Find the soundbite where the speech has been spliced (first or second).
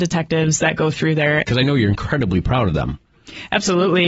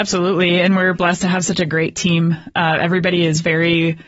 first